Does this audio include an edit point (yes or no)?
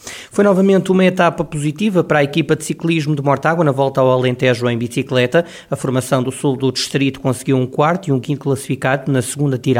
no